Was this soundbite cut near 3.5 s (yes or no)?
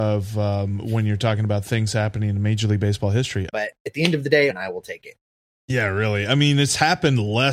yes